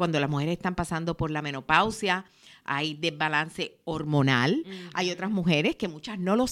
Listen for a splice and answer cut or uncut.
uncut